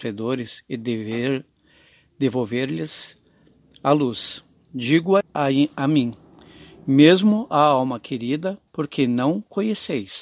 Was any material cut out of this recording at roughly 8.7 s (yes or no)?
yes